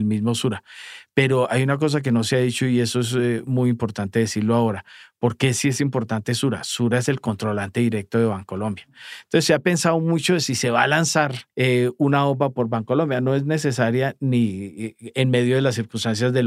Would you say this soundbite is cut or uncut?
cut